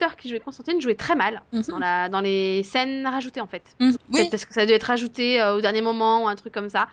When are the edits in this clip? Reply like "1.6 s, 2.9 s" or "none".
3.9 s